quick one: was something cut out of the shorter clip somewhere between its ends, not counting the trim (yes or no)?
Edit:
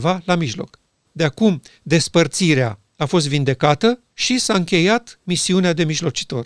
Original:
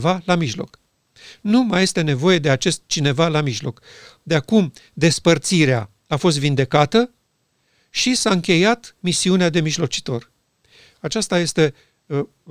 yes